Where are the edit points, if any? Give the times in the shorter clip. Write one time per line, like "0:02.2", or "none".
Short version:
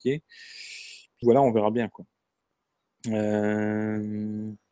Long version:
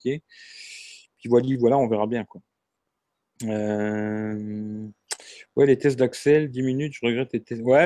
0:01.2